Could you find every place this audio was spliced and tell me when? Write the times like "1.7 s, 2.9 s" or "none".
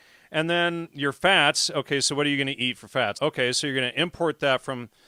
3.2 s